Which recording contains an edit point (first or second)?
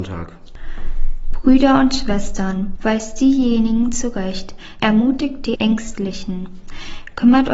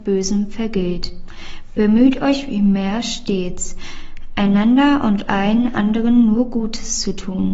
first